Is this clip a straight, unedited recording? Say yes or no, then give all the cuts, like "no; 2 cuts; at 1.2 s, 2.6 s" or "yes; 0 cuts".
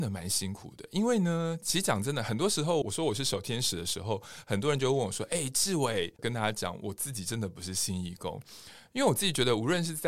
no; 2 cuts; at 2.8 s, 6.2 s